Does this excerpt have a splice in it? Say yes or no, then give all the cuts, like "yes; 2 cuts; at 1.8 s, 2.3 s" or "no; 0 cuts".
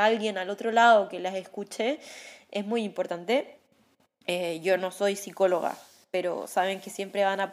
no; 0 cuts